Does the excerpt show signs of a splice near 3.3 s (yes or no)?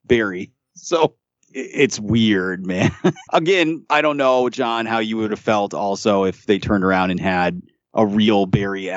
yes